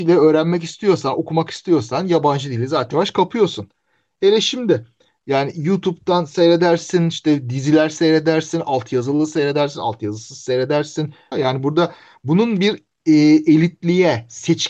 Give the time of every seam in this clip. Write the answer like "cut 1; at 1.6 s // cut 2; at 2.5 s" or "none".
cut 1; at 2.9 s // cut 2; at 11.3 s